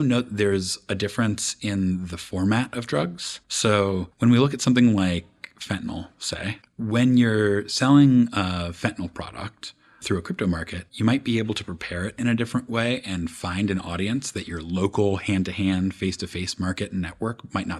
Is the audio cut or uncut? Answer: uncut